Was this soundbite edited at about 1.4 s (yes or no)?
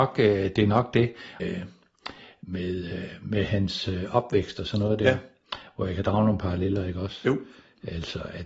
yes